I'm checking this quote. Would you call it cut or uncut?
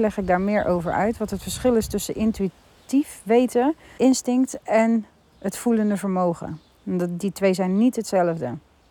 cut